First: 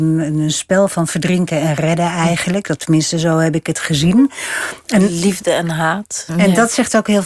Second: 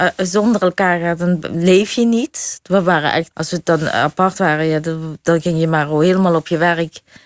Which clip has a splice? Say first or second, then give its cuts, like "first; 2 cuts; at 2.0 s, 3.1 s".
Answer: second; 1 cut; at 3.3 s